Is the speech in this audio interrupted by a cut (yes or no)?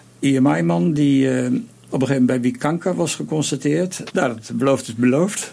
yes